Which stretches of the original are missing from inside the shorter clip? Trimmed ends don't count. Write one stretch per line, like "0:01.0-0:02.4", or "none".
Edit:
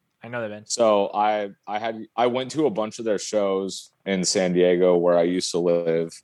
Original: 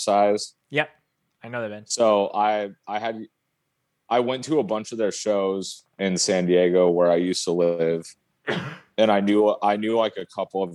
0:03.3-0:04.0